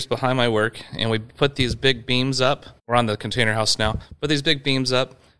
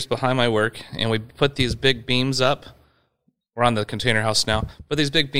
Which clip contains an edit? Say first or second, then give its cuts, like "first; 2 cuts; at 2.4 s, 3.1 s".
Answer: first; 1 cut; at 2.8 s